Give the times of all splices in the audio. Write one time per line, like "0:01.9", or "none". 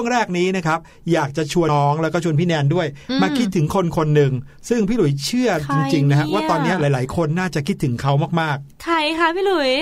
0:01.7